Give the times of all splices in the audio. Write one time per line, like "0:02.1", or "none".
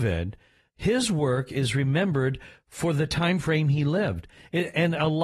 none